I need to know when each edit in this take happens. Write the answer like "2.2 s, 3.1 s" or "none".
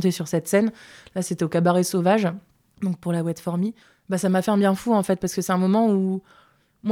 none